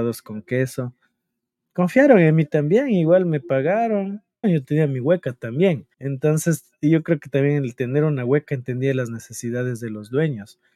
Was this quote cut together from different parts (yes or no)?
yes